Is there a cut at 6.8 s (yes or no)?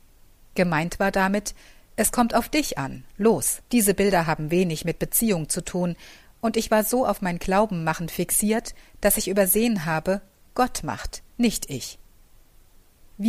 no